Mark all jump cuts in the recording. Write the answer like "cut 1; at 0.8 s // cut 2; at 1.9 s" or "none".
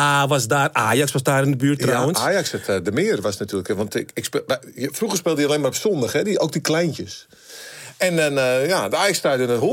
none